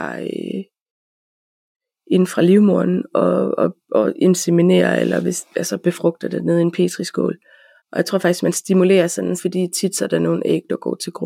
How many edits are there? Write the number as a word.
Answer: two